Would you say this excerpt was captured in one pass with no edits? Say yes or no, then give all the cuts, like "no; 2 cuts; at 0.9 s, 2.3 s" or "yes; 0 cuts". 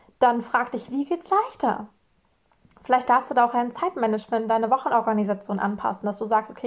yes; 0 cuts